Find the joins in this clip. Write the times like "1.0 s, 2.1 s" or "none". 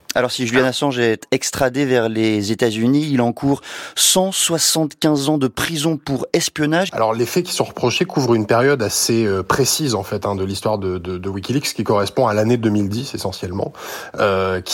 6.9 s